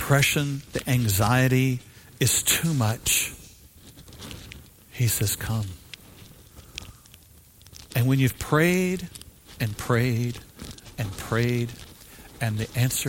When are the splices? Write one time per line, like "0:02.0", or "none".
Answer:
0:07.9

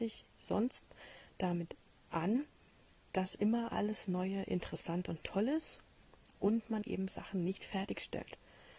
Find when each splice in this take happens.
none

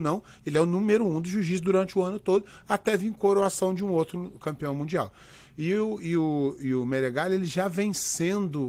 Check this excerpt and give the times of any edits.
none

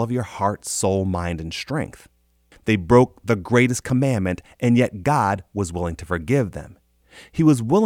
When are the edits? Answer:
0:02.5

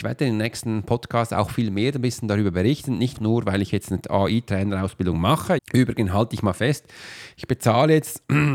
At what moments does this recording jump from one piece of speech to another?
0:03.2
0:05.6

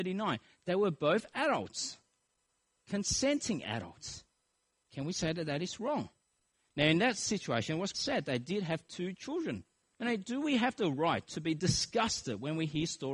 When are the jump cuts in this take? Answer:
0:06.6
0:07.9
0:09.9

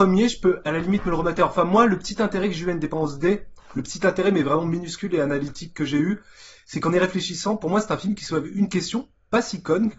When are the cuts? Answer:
none

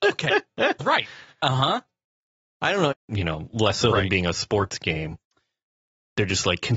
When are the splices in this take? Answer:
0:02.9

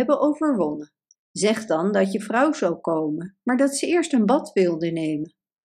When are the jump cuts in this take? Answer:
0:01.1

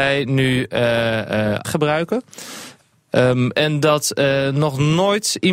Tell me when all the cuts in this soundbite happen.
0:01.6
0:03.5

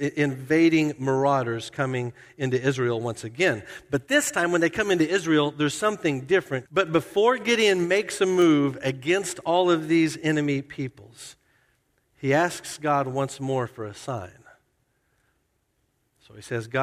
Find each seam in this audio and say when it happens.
0:06.7

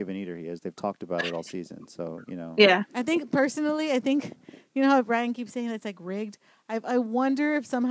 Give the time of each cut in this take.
none

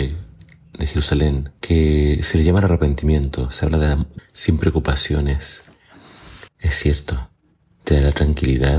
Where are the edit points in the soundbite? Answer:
0:01.6
0:04.2
0:06.5

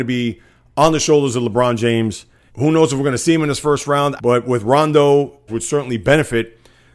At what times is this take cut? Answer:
0:02.5
0:04.2
0:05.5

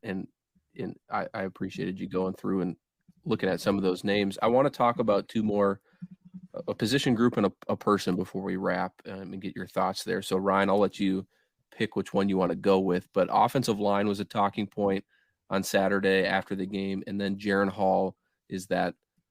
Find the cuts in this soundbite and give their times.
none

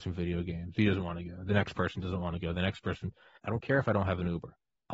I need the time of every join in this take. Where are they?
0:03.4

